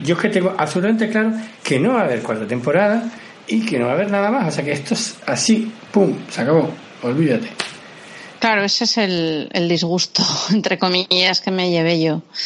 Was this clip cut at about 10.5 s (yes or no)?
no